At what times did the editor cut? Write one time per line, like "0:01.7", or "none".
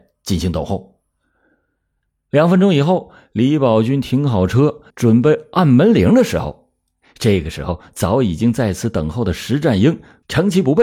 0:04.9

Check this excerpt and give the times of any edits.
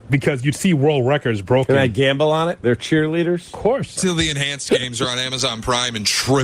0:02.6
0:03.9

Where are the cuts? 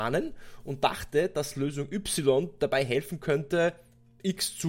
none

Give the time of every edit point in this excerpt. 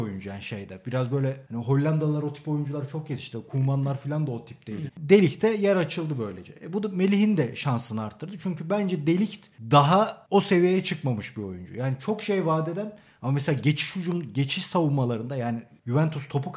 0:04.9

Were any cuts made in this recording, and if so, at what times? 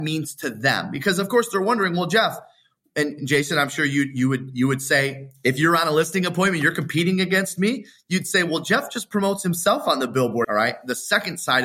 0:10.4

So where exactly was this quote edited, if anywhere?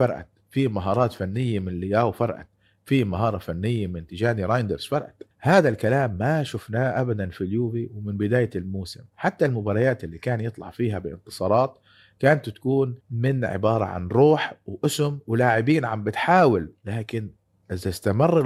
0:05.3
0:13.0
0:16.8

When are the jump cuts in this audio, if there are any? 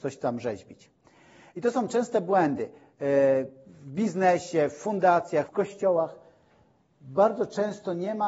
0:05.5

